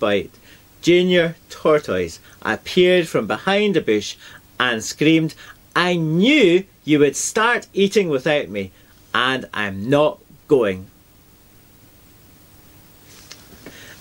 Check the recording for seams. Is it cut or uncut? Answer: uncut